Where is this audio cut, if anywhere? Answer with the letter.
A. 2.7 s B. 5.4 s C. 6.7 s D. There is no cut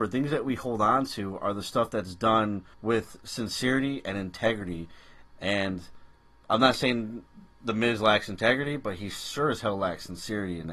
A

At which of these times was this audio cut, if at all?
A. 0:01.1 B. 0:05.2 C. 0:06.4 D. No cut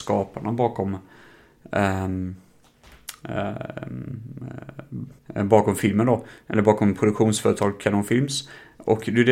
B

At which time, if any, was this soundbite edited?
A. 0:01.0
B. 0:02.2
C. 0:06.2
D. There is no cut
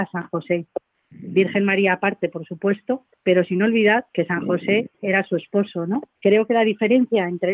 C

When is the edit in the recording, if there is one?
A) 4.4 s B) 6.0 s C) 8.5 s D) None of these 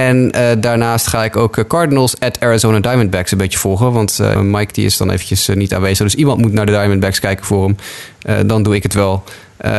A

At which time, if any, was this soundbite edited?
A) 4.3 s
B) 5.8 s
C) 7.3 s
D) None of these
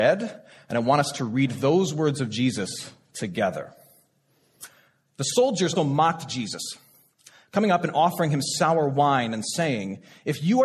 B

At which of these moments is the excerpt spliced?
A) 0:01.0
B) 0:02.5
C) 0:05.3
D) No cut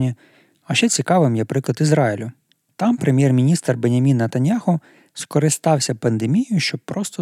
D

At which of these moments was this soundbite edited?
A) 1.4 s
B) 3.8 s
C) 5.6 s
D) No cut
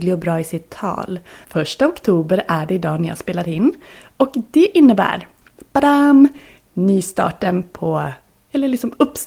A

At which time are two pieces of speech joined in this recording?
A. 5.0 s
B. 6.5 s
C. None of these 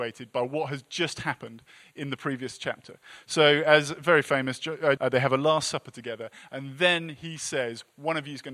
A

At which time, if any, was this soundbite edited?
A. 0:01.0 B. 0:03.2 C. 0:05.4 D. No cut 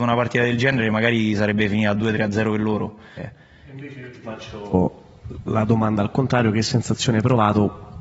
B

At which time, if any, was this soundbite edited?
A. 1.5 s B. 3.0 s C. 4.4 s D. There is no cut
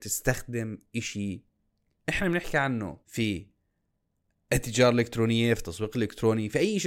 B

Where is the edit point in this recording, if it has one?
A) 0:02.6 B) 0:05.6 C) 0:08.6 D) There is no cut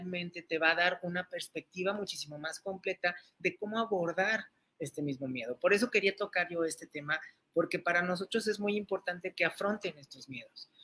D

